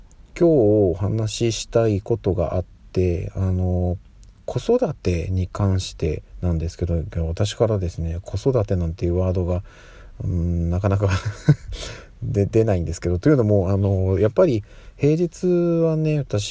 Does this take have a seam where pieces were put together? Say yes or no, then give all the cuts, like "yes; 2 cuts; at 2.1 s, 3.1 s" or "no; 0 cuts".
no; 0 cuts